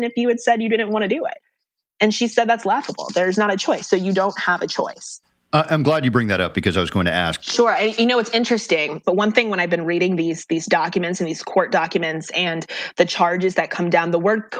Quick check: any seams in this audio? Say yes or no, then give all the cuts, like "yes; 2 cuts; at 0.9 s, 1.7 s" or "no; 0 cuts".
yes; 2 cuts; at 7.4 s, 9.0 s